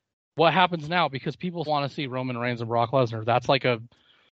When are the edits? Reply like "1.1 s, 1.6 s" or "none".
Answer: 1.7 s